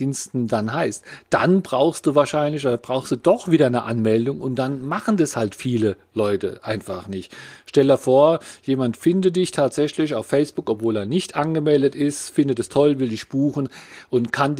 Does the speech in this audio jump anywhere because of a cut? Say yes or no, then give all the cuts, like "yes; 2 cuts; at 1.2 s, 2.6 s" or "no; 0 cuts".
no; 0 cuts